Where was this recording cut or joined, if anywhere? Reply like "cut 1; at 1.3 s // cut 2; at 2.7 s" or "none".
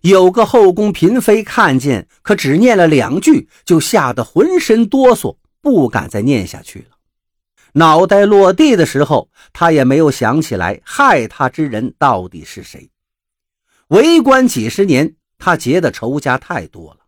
cut 1; at 2.1 s // cut 2; at 7.6 s